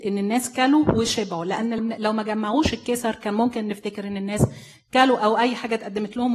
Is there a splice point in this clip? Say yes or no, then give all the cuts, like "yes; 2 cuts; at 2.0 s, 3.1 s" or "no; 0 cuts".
yes; 1 cut; at 1.8 s